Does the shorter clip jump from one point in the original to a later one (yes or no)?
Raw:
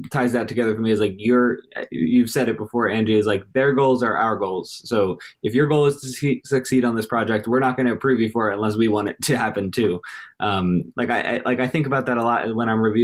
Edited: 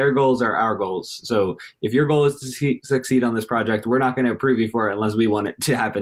no